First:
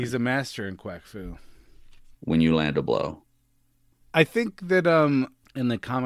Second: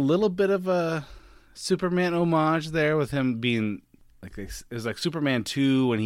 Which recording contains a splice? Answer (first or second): first